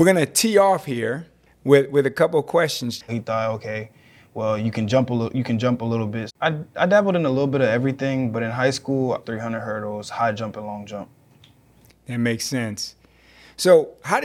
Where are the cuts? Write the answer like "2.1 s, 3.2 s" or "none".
3.1 s, 6.3 s, 9.2 s